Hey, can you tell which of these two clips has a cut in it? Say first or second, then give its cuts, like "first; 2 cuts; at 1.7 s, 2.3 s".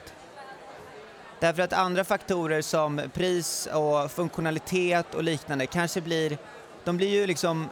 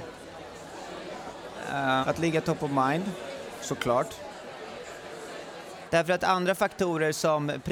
second; 2 cuts; at 2.0 s, 5.9 s